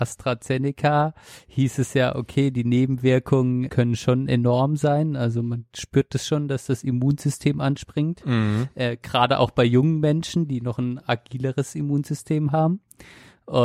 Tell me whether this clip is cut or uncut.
cut